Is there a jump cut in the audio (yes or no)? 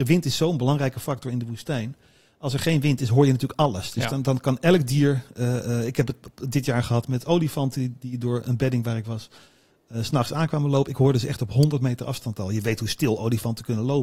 no